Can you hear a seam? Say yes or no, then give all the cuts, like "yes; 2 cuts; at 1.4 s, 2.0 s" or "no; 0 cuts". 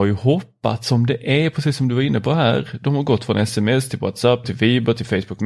yes; 1 cut; at 4.4 s